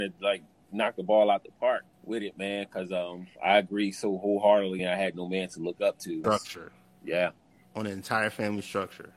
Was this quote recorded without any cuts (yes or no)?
no